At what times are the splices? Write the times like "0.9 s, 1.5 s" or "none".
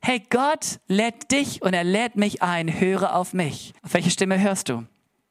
3.8 s